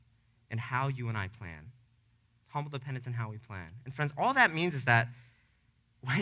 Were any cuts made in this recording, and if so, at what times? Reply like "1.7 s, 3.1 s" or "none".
none